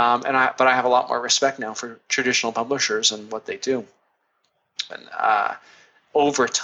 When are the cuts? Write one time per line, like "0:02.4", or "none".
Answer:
0:04.9